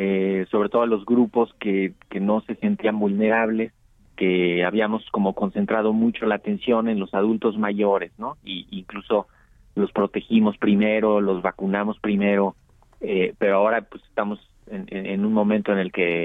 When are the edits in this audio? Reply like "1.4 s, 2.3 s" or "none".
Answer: 4.0 s